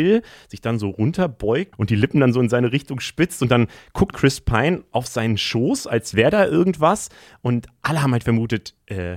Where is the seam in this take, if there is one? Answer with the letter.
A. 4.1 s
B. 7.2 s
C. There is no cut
A